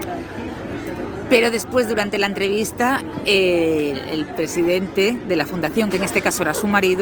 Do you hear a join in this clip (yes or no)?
no